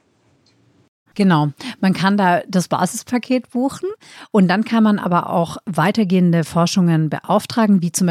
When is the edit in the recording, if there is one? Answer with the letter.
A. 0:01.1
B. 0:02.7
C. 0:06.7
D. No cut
A